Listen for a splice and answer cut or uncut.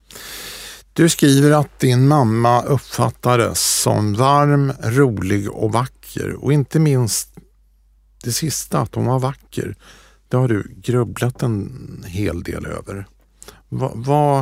uncut